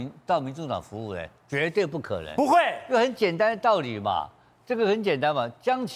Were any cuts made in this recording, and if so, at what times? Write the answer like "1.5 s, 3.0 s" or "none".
none